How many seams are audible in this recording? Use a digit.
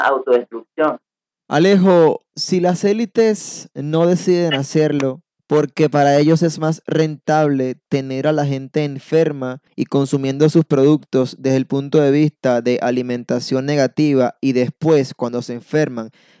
0